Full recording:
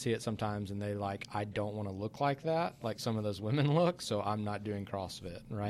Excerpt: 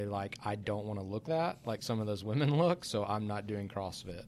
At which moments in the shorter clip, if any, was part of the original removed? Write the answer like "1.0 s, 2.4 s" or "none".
1.2 s